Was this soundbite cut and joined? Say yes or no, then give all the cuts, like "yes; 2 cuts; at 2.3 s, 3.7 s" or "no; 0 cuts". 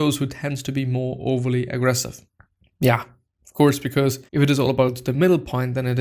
yes; 1 cut; at 4.3 s